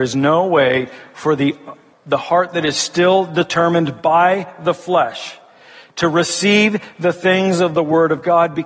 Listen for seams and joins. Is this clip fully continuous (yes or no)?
no